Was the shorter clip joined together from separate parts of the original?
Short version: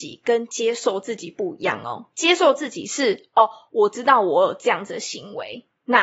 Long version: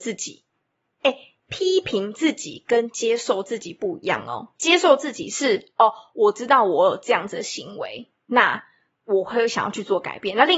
no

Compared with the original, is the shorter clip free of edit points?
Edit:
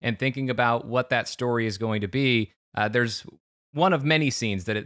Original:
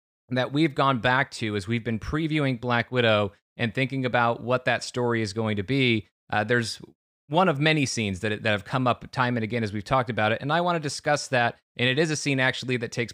yes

